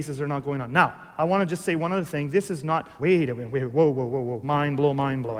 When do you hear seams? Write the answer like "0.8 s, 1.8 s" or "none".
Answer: 3.0 s, 4.4 s